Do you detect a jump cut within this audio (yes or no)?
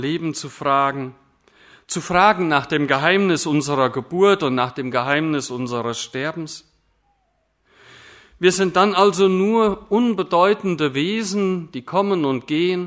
no